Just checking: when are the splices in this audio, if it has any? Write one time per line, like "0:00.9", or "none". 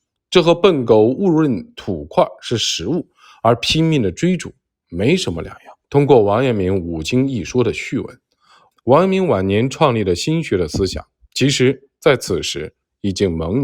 0:05.8
0:08.7

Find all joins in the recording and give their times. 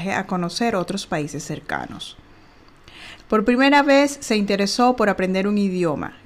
0:03.2

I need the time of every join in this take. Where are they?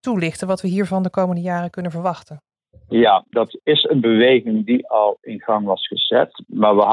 0:03.3

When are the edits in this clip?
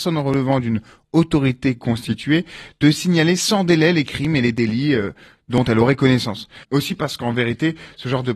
0:06.6

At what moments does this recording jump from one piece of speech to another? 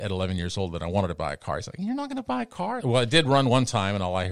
0:02.8

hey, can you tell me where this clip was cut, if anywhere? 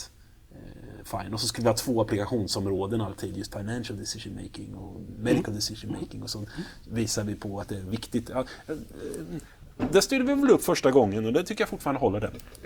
0:03.5

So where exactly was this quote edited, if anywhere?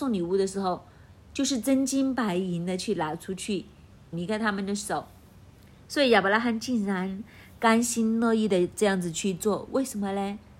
0:04.1

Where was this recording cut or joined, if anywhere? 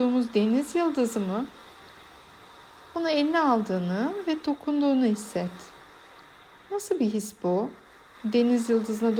none

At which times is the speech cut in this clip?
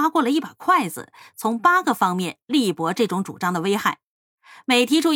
none

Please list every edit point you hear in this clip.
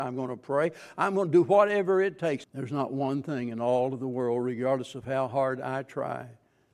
0:02.4

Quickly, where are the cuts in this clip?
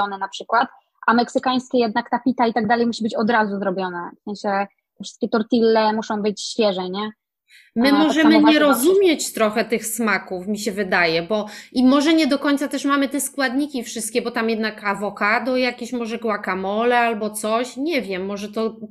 none

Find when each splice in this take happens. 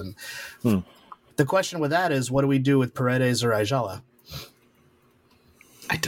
0:01.3

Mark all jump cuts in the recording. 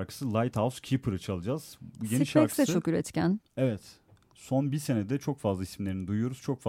none

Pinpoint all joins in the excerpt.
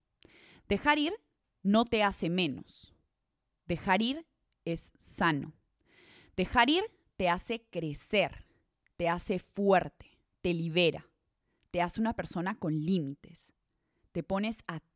none

